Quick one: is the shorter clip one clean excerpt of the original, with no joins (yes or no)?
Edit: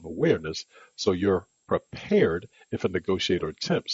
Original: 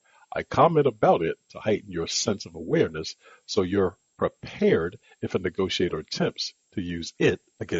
yes